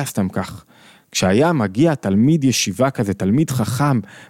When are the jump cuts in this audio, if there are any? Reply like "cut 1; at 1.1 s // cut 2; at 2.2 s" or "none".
none